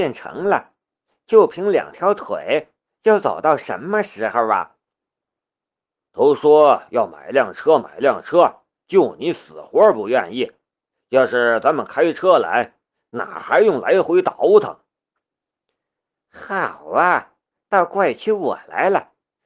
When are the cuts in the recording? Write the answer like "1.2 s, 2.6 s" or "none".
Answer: 6.1 s